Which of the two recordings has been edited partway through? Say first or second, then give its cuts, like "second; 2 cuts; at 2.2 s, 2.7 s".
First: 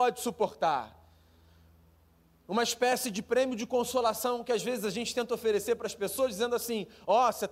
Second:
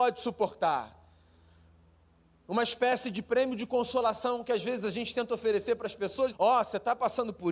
second; 1 cut; at 6.3 s